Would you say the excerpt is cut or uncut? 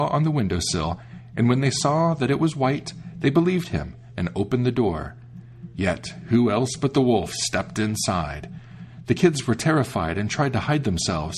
uncut